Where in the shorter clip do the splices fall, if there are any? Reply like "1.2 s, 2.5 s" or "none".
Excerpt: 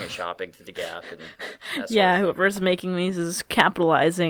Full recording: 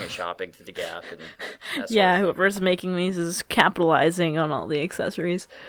none